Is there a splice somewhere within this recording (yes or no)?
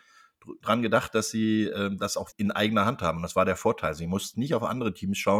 yes